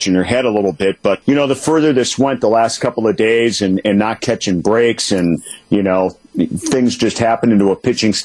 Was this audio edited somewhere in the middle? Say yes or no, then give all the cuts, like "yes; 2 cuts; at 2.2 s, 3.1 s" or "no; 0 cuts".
yes; 1 cut; at 1.2 s